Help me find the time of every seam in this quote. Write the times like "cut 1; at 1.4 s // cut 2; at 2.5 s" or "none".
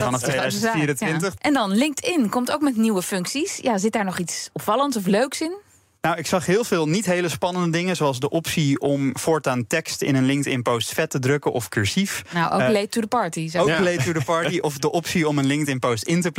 cut 1; at 1.4 s